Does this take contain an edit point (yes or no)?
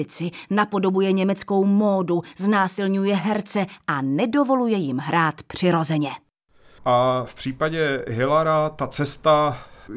yes